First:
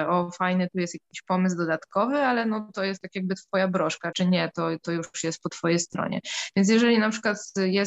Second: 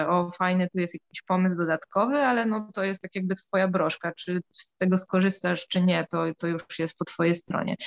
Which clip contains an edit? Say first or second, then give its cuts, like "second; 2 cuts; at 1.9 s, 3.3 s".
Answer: first; 1 cut; at 4.1 s